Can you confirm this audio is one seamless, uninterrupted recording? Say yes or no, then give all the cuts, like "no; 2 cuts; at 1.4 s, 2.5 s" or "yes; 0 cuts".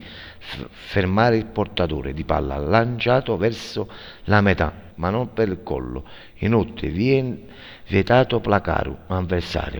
no; 1 cut; at 4.9 s